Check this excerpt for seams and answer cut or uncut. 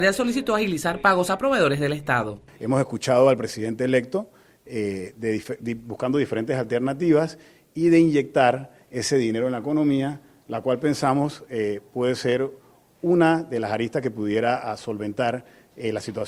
uncut